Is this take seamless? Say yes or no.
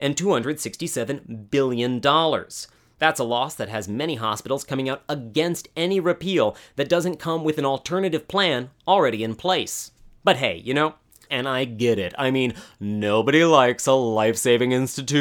no